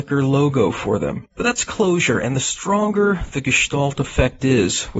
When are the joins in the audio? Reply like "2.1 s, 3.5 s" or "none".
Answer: 1.3 s